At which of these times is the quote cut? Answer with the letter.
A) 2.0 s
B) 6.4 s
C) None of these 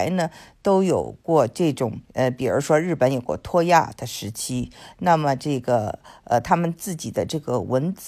A